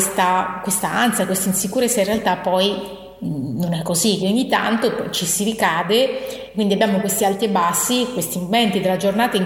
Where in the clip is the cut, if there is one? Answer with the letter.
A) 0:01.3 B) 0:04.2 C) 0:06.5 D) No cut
B